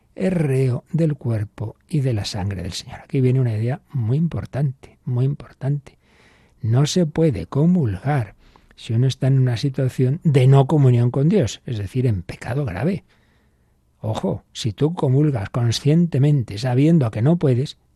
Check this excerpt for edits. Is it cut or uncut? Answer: uncut